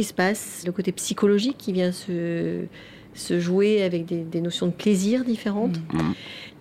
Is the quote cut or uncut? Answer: uncut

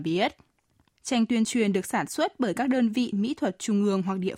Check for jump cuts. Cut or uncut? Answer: cut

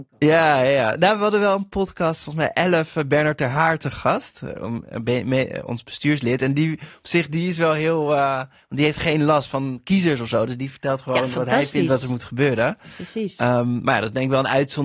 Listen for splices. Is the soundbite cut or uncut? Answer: uncut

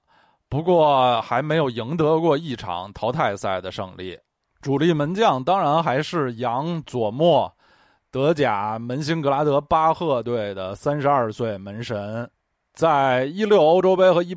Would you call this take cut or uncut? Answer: cut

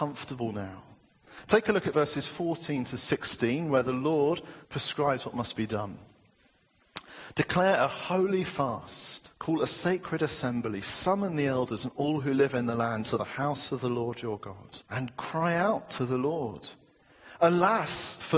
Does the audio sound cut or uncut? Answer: cut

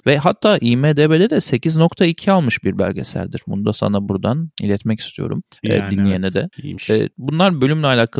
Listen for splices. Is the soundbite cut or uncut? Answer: uncut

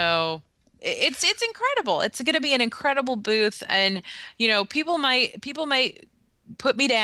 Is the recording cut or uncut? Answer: uncut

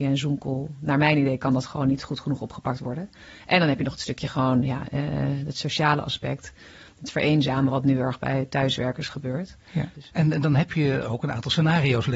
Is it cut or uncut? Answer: cut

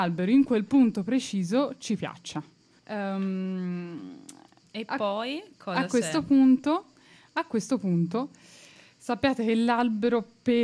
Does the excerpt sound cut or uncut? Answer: cut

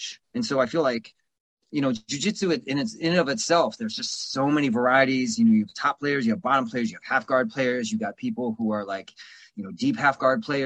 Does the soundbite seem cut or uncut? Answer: uncut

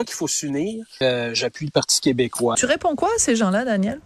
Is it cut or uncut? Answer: cut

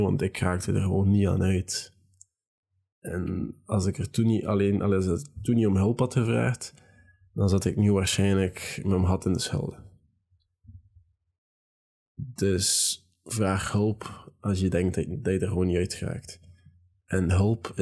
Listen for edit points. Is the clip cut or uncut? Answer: uncut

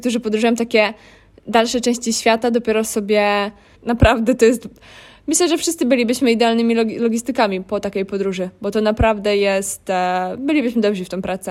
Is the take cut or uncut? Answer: cut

